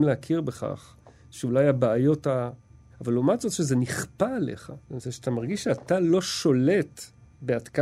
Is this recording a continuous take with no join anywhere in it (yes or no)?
no